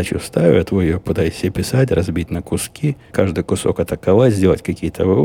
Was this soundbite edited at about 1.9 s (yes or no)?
no